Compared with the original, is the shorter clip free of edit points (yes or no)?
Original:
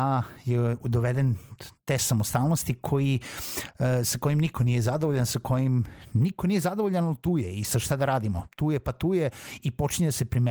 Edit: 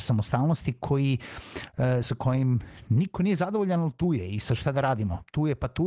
no